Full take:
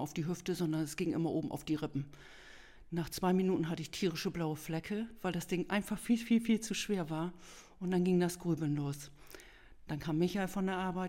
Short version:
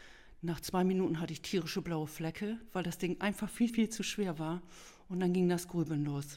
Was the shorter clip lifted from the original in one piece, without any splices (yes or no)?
no